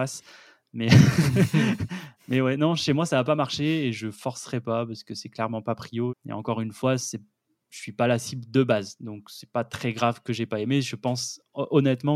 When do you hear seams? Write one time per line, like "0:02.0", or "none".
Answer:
0:06.1